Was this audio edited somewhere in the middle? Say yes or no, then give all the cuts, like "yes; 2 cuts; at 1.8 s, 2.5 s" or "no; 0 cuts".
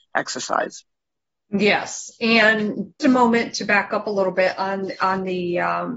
yes; 1 cut; at 3.0 s